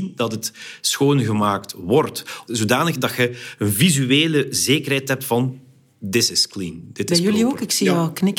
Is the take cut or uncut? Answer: cut